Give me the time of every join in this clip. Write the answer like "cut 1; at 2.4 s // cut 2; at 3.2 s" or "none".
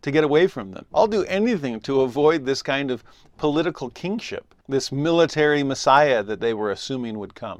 cut 1; at 0.9 s // cut 2; at 4.6 s